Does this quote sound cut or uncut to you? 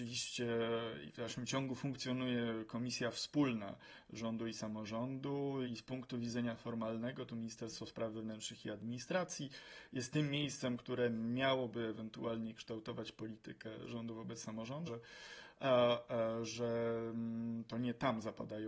cut